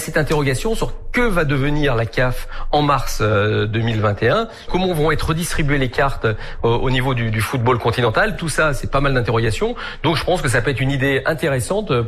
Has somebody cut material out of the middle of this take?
no; 0 cuts

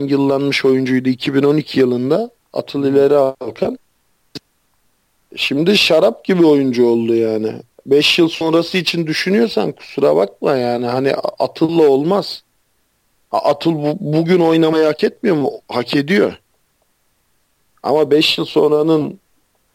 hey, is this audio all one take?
yes; 0 cuts

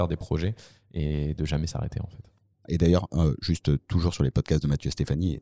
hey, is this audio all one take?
no; 1 cut; at 2.6 s

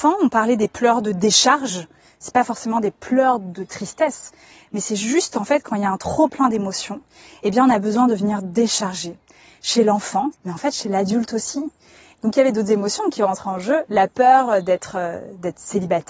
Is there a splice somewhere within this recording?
yes; 3 cuts; at 10.3 s, 12.1 s, 13.9 s

